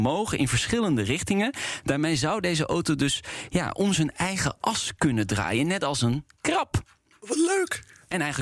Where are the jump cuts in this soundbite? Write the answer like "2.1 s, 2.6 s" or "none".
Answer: none